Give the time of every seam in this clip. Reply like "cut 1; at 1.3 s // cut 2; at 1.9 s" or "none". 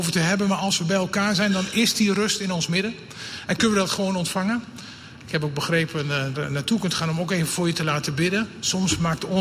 cut 1; at 6.3 s